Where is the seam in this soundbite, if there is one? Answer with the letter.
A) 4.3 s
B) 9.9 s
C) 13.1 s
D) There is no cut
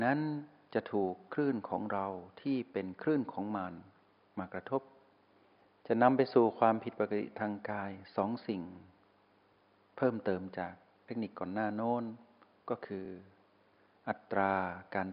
D